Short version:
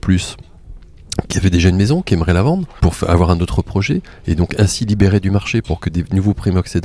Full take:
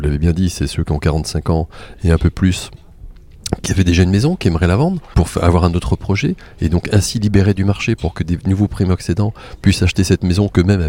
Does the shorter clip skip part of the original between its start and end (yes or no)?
no